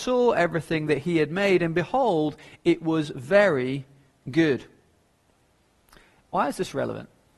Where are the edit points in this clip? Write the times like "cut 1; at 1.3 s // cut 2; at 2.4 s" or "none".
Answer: none